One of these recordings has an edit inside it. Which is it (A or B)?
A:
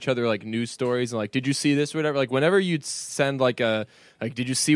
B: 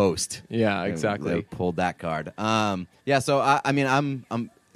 B